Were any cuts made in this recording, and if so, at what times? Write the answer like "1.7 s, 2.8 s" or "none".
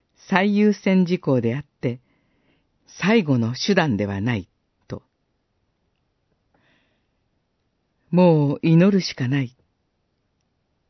none